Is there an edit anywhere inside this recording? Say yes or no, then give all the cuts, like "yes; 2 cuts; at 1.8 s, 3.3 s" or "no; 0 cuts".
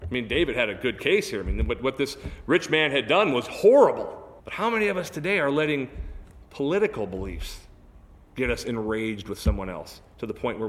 yes; 1 cut; at 4.4 s